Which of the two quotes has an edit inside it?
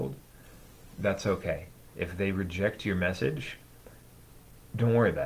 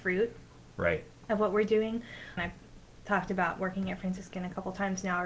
second; 1 cut; at 2.4 s

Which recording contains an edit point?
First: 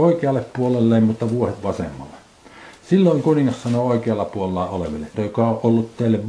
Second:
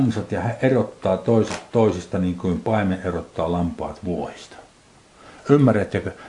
first; 1 cut; at 5.1 s

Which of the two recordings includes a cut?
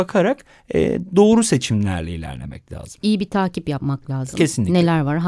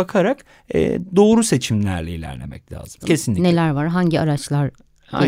second; 1 cut; at 3.0 s

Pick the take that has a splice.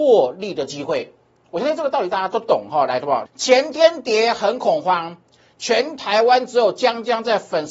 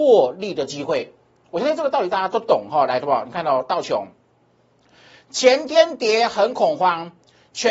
first; 1 cut; at 3.3 s

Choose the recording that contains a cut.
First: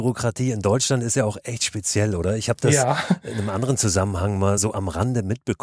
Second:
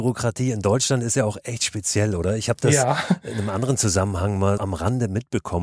second; 1 cut; at 4.6 s

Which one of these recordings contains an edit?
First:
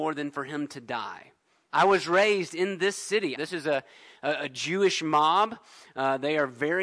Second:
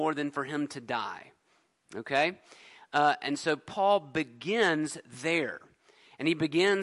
first; 2 cuts; at 1.7 s, 3.3 s

